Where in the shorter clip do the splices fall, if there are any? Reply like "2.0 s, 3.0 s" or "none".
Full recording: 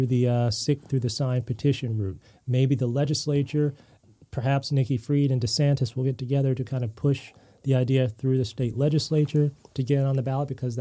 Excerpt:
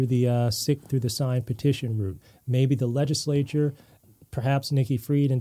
none